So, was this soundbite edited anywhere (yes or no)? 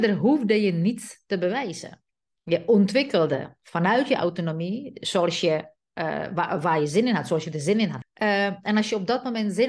yes